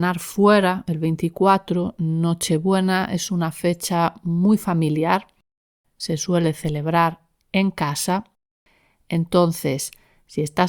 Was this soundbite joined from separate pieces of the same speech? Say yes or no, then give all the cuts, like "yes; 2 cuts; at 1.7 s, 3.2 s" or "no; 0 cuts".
no; 0 cuts